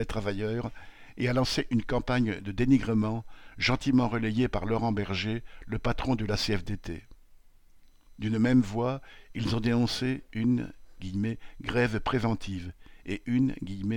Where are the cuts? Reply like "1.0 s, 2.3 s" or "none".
none